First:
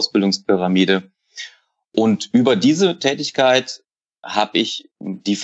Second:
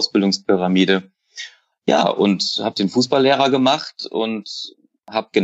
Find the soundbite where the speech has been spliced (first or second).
second